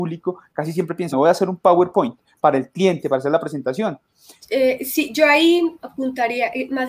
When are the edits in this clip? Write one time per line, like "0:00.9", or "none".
0:01.1
0:04.4
0:05.8